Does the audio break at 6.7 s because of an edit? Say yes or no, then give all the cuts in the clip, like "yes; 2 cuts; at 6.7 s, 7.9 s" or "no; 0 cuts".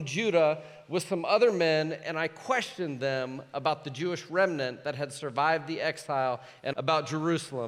yes; 1 cut; at 6.7 s